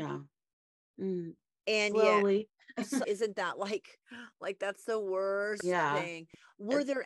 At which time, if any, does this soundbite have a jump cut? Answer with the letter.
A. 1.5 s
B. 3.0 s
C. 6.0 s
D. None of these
B